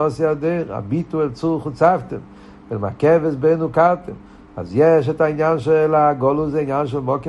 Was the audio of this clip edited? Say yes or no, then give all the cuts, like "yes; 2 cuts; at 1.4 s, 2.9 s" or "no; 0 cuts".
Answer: yes; 1 cut; at 4.5 s